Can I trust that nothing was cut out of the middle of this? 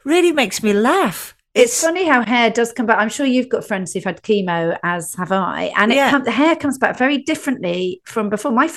yes; 0 cuts

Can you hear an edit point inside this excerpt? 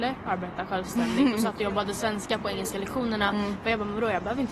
no; 0 cuts

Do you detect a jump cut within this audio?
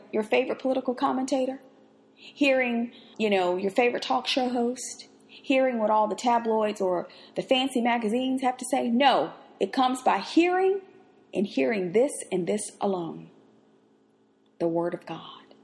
yes; 1 cut; at 3.1 s

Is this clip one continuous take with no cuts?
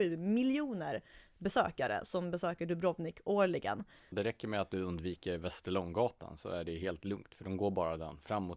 no; 1 cut; at 4.1 s

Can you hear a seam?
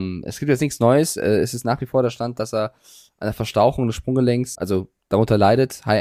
yes; 1 cut; at 4.5 s

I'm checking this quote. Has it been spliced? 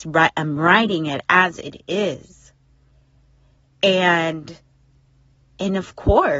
no; 0 cuts

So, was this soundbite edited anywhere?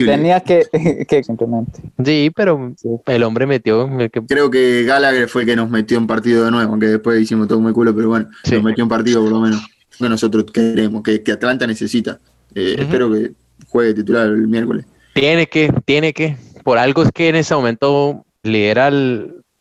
yes; 3 cuts; at 1.2 s, 10.0 s, 18.4 s

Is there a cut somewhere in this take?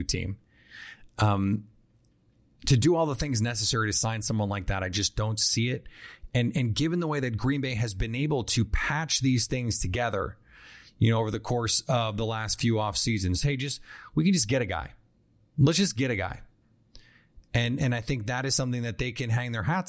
yes; 1 cut; at 17.5 s

